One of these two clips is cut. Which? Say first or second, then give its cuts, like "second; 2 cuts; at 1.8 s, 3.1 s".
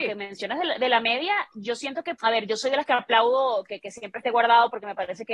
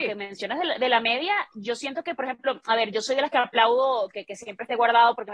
first; 1 cut; at 2.2 s